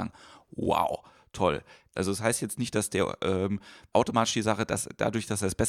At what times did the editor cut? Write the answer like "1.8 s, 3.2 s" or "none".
1.9 s, 3.9 s